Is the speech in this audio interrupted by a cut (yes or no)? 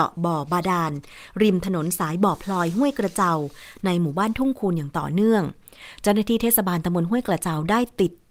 no